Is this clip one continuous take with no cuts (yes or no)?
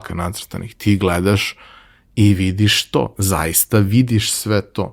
yes